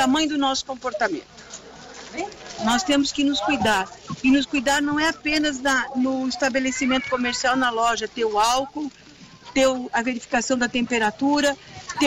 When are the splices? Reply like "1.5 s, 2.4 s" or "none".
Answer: 2.6 s